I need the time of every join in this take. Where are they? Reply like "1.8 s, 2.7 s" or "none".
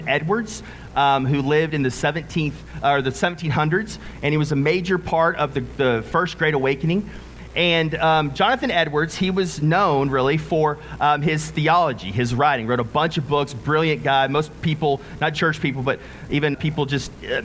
15.3 s, 16.5 s